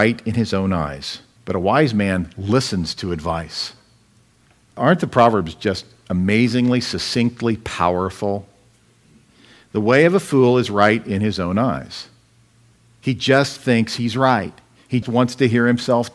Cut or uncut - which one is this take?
cut